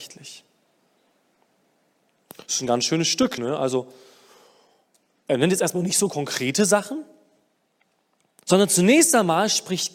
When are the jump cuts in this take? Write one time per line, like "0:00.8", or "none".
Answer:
none